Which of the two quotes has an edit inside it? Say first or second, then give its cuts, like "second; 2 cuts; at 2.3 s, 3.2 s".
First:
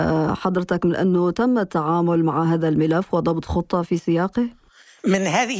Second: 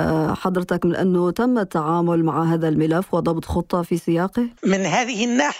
second; 1 cut; at 4.6 s